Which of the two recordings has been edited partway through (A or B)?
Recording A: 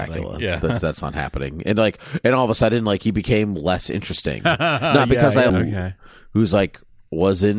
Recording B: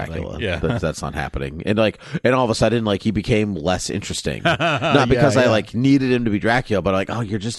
A